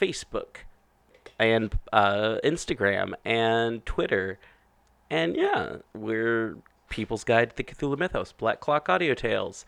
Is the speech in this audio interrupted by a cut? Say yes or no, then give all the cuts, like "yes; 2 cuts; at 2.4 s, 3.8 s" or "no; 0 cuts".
no; 0 cuts